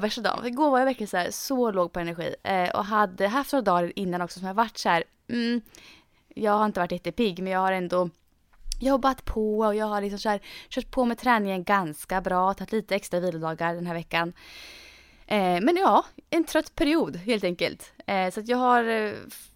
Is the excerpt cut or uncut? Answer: uncut